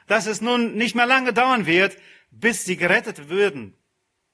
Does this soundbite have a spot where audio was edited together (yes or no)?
no